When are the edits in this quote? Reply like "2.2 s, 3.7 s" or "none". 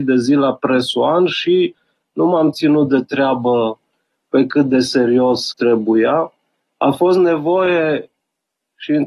5.5 s